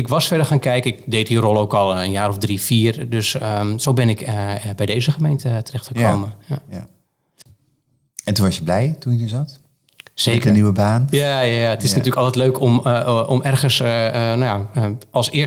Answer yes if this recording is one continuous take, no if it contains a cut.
yes